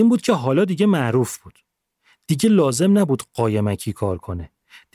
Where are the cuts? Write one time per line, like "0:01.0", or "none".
none